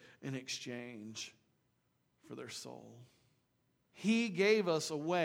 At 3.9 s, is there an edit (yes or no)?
yes